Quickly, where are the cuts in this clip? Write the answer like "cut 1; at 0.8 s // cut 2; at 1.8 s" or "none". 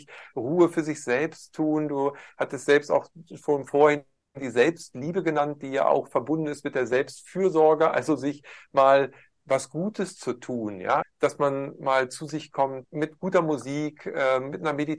cut 1; at 11.0 s // cut 2; at 12.8 s